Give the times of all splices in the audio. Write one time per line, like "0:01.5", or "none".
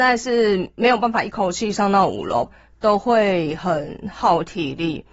0:02.4